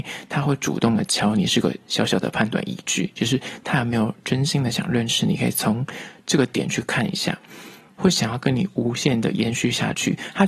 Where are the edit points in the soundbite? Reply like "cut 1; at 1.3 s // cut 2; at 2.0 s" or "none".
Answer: cut 1; at 8.0 s